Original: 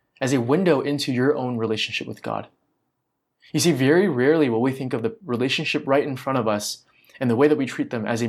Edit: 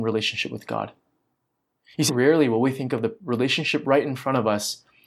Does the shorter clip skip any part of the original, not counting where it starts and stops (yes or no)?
yes